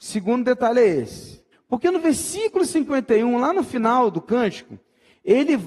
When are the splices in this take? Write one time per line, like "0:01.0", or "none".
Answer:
0:01.5